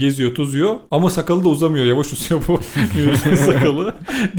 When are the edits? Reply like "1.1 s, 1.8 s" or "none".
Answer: none